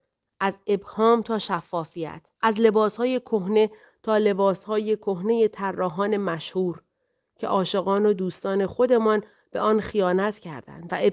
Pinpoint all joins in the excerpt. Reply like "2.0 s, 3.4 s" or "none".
2.4 s